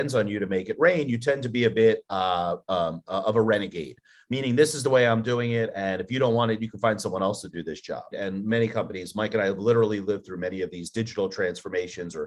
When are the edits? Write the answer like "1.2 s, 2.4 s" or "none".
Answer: 8.1 s